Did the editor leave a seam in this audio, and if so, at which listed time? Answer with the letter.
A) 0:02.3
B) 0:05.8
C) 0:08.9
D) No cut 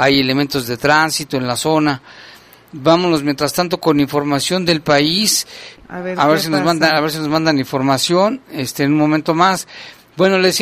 B